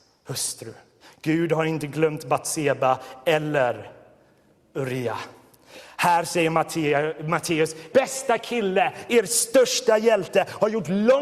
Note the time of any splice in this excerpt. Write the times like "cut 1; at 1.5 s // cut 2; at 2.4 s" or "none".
cut 1; at 7.9 s

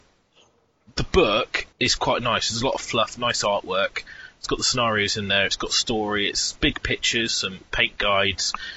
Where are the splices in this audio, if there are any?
cut 1; at 1.7 s // cut 2; at 7.3 s

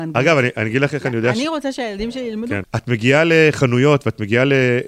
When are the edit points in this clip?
cut 1; at 2.6 s

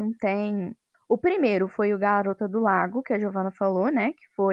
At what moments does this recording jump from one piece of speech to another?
cut 1; at 0.9 s

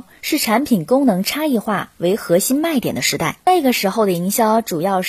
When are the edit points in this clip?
cut 1; at 3.4 s

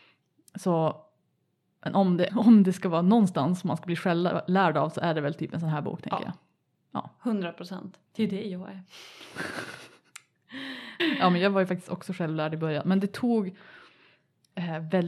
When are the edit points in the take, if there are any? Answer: cut 1; at 2.3 s // cut 2; at 8.1 s // cut 3; at 11.0 s

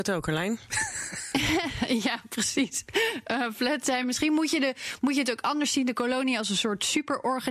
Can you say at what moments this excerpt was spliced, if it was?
none

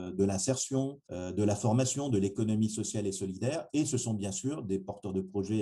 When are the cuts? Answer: cut 1; at 1.0 s

